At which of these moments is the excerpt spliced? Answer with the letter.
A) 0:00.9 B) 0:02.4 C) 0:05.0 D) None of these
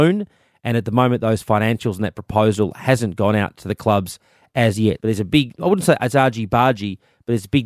C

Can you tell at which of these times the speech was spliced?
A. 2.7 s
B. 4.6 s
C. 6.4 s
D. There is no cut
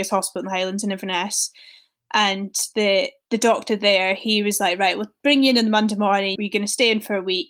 C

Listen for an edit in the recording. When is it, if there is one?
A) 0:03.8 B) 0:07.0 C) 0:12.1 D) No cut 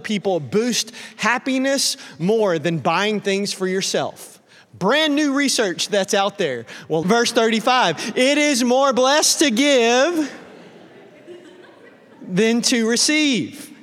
B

